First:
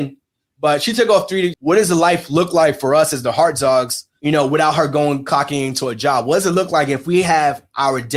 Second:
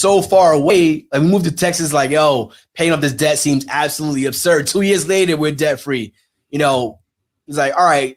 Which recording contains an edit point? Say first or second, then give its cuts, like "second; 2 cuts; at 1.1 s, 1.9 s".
first; 1 cut; at 1.5 s